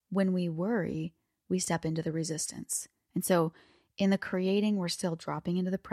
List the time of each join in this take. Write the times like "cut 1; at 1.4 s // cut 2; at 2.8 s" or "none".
cut 1; at 3.1 s

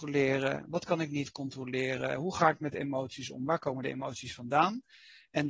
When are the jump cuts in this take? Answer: none

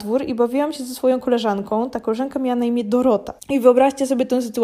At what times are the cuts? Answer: cut 1; at 3.4 s

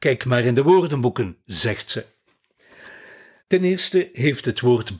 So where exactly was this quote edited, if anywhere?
cut 1; at 3.4 s

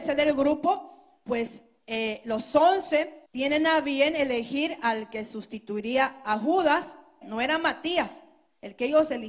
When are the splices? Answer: cut 1; at 3.3 s // cut 2; at 7.2 s

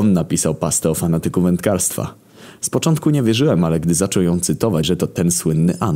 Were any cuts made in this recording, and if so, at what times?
cut 1; at 4.8 s

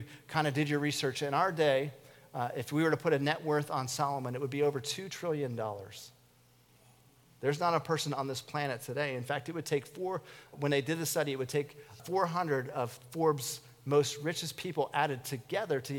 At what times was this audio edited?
cut 1; at 10.5 s // cut 2; at 12.0 s

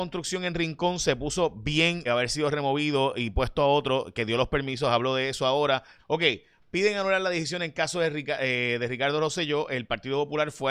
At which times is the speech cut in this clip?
cut 1; at 2.1 s // cut 2; at 6.0 s

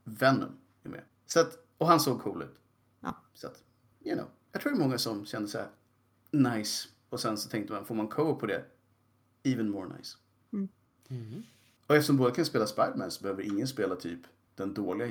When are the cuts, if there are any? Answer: none

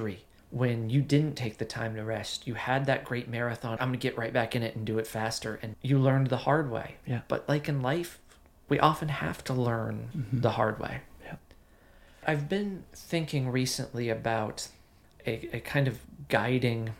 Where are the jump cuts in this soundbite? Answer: cut 1; at 3.8 s // cut 2; at 5.7 s

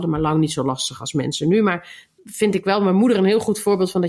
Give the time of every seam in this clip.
cut 1; at 2.2 s

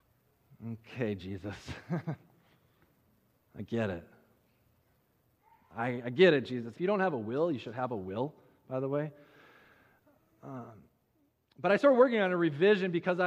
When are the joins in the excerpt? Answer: cut 1; at 6.7 s

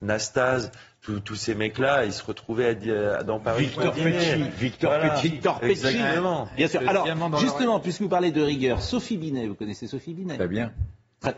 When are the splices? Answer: none

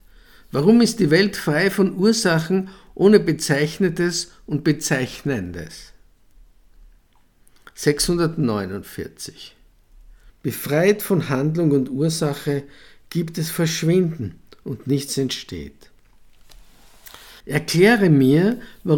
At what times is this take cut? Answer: cut 1; at 10.3 s // cut 2; at 17.4 s

